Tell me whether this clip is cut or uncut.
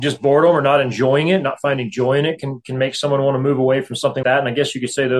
cut